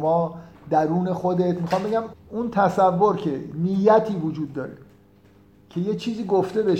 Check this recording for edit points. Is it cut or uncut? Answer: cut